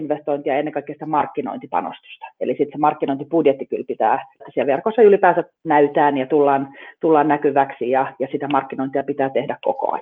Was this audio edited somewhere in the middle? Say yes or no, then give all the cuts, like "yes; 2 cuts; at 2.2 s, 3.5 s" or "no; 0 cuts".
yes; 2 cuts; at 4.4 s, 5.5 s